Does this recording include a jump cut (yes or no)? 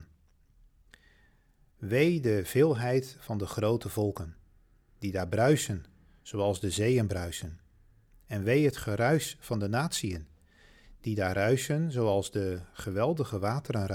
no